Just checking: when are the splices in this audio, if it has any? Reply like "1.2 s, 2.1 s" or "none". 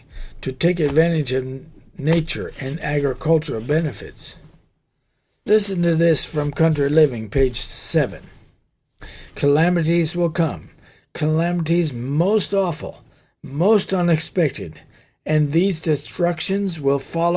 none